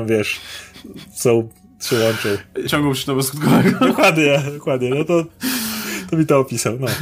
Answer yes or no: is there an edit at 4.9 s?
no